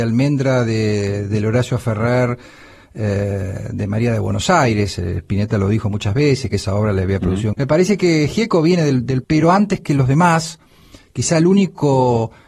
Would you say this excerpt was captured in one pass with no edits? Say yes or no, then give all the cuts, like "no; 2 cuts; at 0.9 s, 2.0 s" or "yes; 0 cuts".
no; 2 cuts; at 7.5 s, 9.2 s